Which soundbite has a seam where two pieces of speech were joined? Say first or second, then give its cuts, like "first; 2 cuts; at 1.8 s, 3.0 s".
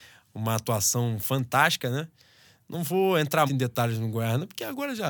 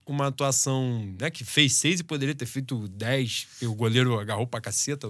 first; 1 cut; at 3.5 s